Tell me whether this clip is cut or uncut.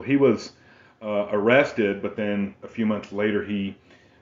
uncut